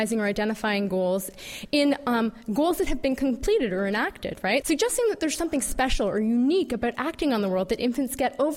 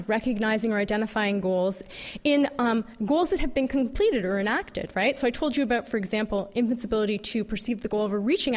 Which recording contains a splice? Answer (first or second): first